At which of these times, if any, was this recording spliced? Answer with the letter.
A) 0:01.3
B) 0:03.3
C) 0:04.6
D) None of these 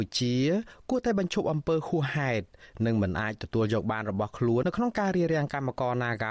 C